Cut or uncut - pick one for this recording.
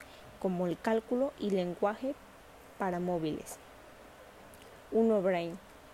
cut